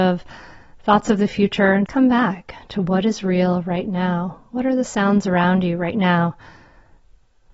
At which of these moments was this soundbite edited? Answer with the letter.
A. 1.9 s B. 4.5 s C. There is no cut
A